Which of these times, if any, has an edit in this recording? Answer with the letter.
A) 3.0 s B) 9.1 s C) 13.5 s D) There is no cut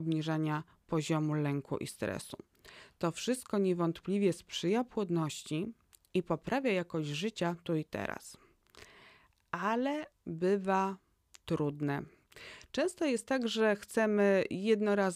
D